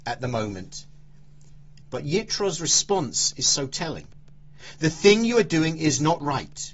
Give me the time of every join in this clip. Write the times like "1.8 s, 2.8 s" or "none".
1.8 s